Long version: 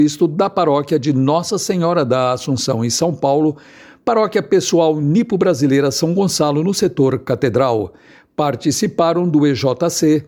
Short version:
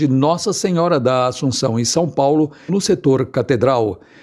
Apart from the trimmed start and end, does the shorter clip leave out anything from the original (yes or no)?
yes